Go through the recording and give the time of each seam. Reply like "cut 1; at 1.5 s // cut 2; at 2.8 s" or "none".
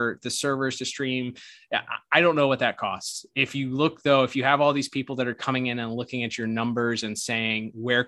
none